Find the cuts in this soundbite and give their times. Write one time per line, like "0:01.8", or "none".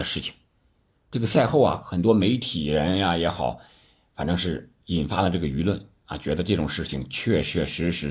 none